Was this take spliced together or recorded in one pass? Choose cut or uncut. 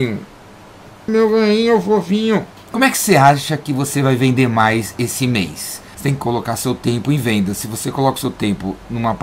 cut